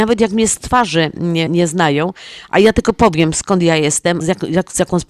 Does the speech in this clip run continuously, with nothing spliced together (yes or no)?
no